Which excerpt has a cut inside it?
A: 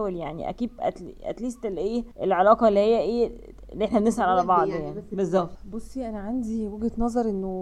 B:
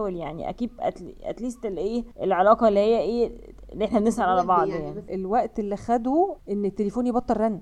B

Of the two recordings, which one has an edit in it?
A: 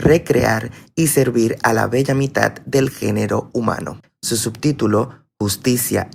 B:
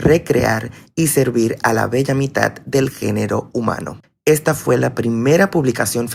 A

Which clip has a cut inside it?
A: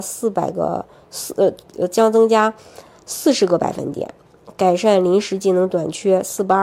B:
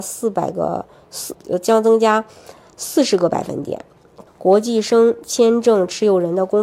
B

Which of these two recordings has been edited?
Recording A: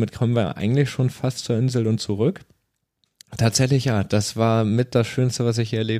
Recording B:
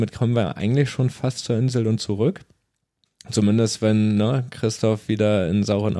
A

